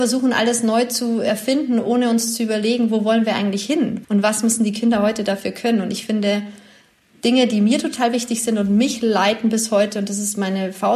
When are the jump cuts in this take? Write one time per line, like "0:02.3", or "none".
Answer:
0:04.0

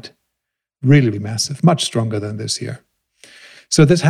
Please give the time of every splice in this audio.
0:01.1

